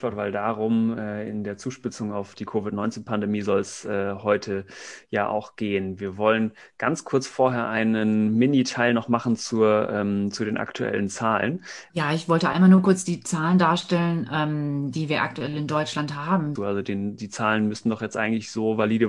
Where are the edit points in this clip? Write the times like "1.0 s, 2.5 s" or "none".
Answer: 11.9 s, 16.6 s